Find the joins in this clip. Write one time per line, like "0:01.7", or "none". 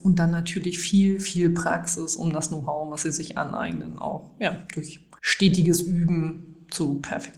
0:05.2